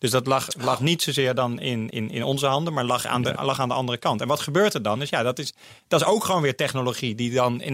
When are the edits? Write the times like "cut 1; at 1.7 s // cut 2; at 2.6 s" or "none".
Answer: cut 1; at 1.9 s